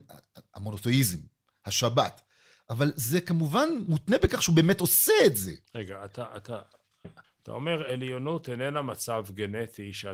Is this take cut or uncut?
cut